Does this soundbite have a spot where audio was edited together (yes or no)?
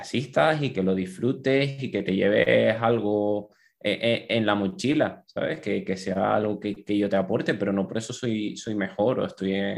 no